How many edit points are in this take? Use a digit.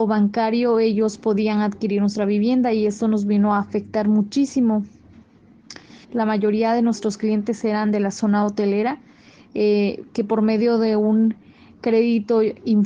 1